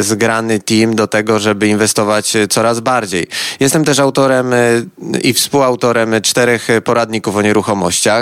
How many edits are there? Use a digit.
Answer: 0